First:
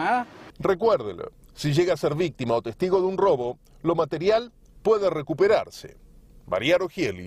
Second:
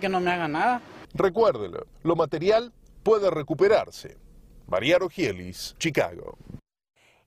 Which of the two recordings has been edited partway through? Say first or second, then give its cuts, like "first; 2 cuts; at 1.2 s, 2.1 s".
second; 2 cuts; at 1.9 s, 5.8 s